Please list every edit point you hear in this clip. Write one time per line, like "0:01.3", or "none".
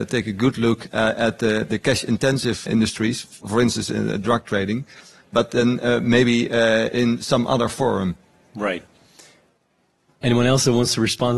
0:02.7

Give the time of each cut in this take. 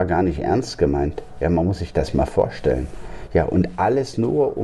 none

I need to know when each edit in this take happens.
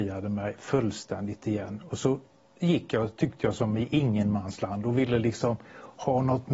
none

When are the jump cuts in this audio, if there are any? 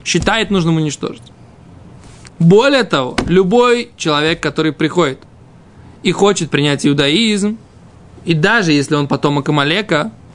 0:02.3

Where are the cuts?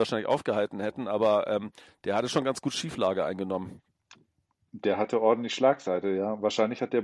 none

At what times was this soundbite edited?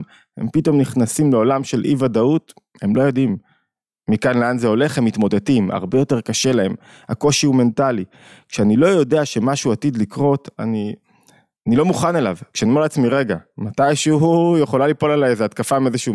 none

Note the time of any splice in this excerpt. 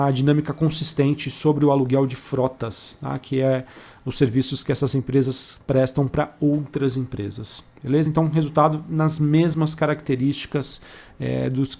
none

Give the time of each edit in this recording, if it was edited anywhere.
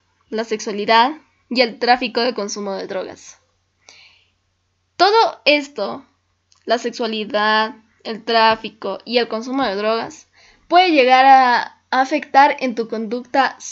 none

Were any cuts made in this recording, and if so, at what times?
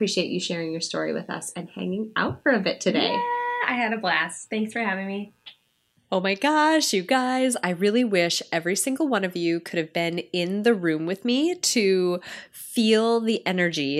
none

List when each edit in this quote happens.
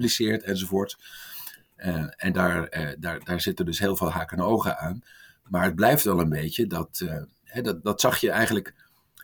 0:07.8

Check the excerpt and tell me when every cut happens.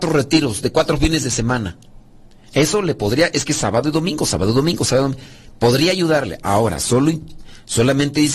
none

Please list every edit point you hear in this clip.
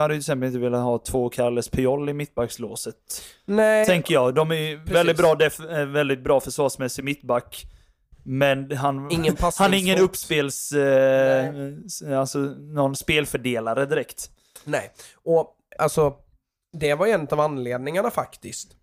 0:15.8

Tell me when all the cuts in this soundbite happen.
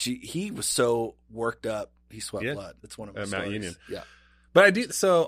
0:02.8

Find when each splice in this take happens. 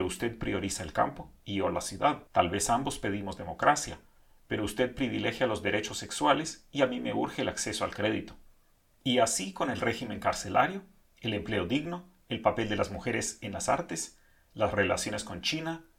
0:02.3

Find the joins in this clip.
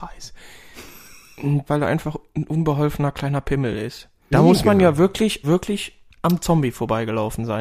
0:01.7
0:04.3
0:05.4

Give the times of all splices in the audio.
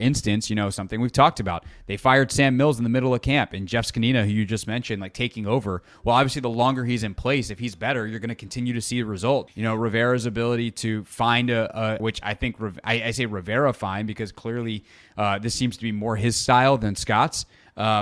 0:09.5
0:12.0

